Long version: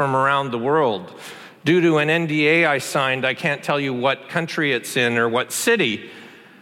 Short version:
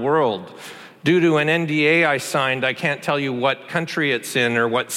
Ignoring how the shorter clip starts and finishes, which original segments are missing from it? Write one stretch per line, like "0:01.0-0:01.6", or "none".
none